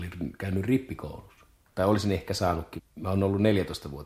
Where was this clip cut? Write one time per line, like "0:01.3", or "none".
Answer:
0:01.7
0:02.8